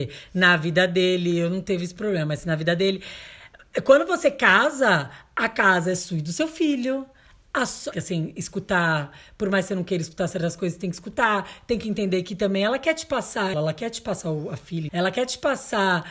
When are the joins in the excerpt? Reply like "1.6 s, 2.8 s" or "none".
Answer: 7.9 s, 13.5 s, 14.9 s